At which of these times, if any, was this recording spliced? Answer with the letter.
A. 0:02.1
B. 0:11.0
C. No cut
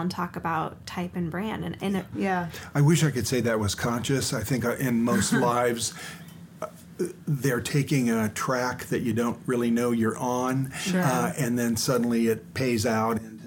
A